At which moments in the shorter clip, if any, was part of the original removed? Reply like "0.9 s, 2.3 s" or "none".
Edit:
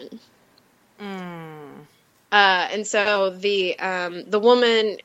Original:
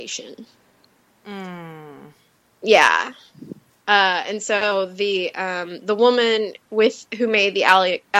2.1 s

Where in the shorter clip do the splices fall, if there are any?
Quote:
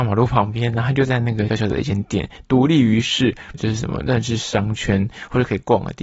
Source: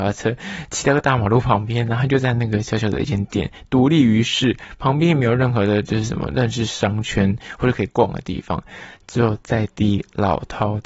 1.5 s, 3.5 s

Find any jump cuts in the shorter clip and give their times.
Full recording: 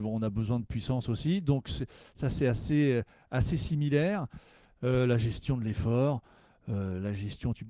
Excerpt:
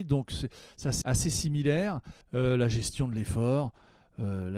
1.0 s, 2.2 s

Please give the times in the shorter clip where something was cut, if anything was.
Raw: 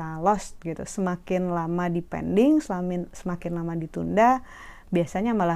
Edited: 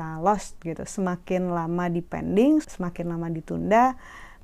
2.6 s

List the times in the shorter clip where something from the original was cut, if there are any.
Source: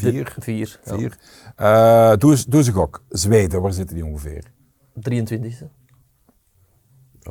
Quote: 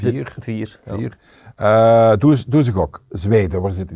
none

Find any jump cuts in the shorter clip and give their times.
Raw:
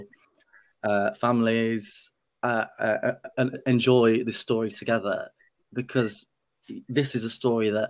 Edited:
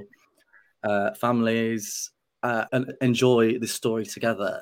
2.7 s

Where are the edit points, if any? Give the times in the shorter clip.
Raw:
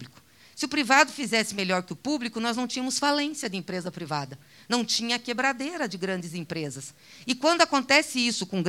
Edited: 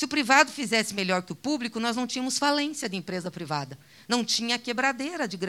none

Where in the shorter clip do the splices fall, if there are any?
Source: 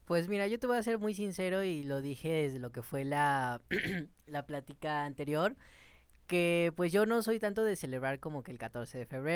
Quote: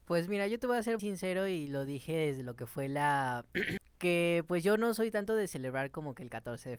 1.0 s, 3.8 s

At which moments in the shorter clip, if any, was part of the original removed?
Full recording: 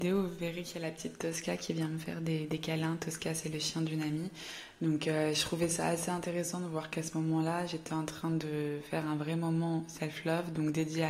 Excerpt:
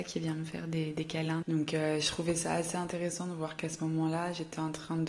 1.4 s

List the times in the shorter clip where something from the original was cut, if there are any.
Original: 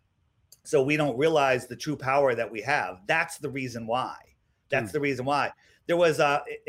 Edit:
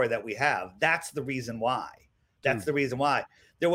none

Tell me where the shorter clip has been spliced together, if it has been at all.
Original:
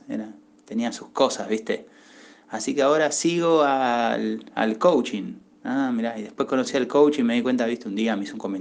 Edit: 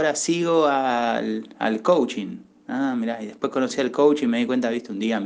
none

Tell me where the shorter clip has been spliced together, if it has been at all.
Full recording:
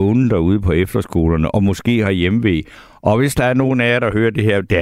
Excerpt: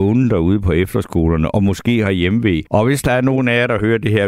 2.7 s

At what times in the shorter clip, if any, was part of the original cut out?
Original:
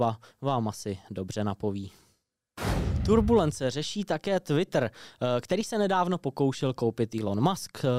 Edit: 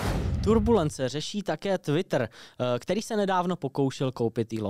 none

